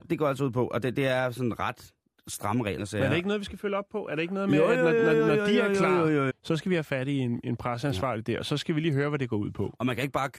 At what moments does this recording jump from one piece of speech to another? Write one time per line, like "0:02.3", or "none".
0:02.8
0:06.3

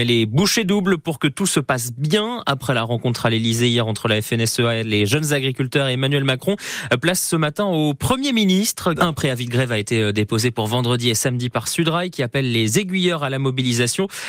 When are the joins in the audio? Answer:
0:09.0

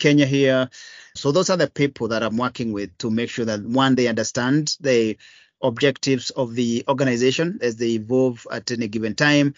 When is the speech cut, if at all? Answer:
0:01.2
0:07.6

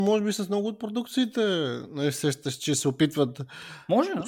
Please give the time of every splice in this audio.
none

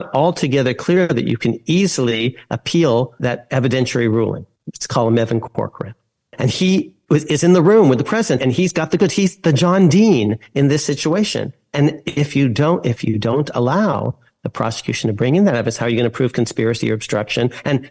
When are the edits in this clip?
0:04.6
0:08.4

